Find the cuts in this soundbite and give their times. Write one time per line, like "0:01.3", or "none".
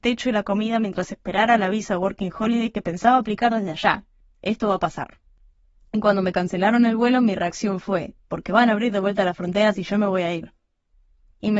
0:04.2
0:08.2